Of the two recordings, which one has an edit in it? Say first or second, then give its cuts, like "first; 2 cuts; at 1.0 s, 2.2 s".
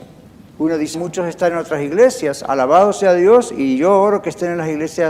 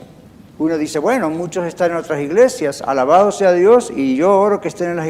first; 1 cut; at 0.9 s